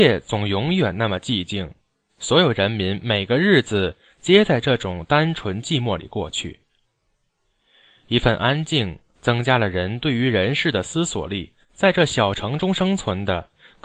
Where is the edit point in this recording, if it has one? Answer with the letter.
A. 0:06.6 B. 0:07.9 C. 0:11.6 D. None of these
C